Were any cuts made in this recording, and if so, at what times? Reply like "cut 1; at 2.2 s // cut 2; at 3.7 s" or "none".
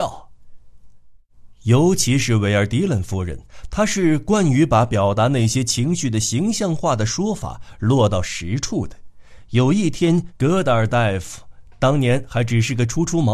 cut 1; at 10.3 s